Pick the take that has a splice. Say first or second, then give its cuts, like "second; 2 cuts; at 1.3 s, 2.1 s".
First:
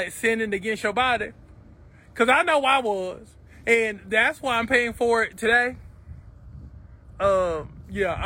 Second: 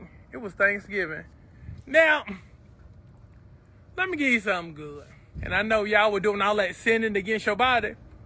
second; 2 cuts; at 1.8 s, 5.3 s